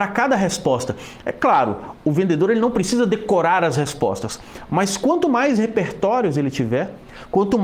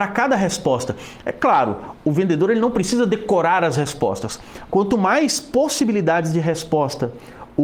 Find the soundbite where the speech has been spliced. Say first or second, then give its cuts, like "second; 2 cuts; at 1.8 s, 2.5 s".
second; 1 cut; at 4.7 s